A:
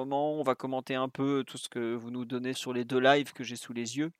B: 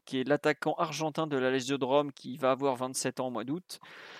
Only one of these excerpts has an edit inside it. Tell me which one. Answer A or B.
A